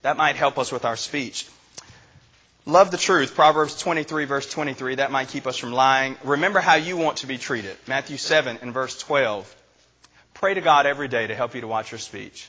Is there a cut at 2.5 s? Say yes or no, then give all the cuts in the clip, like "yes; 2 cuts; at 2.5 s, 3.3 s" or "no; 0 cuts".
no; 0 cuts